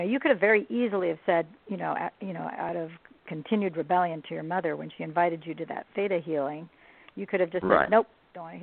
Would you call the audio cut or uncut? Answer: uncut